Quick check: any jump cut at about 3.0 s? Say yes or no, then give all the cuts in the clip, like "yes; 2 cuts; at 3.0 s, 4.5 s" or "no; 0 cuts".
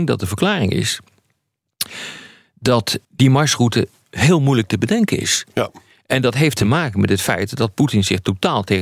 yes; 1 cut; at 3.0 s